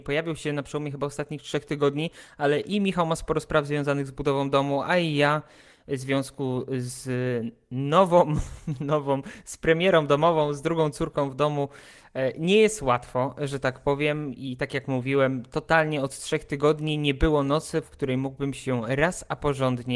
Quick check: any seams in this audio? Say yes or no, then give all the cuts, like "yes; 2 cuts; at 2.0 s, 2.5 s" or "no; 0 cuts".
no; 0 cuts